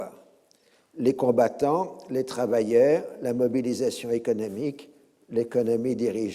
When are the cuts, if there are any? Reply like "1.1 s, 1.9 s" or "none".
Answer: none